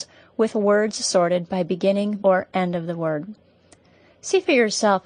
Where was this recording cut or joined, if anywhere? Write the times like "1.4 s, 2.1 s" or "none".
2.2 s